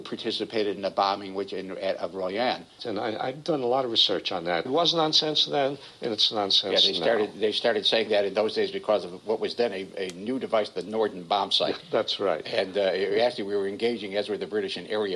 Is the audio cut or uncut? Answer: cut